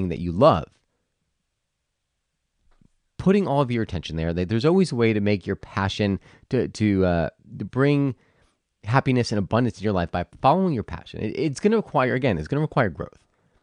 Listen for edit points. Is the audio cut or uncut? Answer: uncut